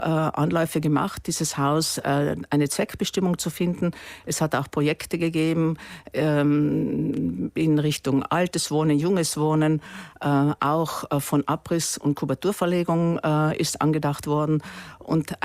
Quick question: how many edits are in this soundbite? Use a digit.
0